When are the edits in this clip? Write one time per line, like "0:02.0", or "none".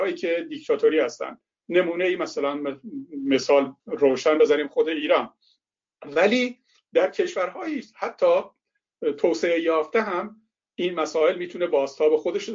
0:03.8